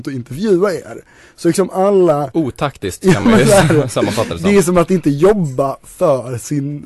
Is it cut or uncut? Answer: uncut